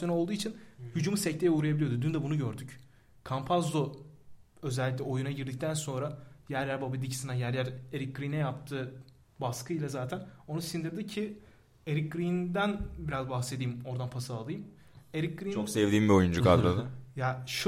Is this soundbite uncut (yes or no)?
yes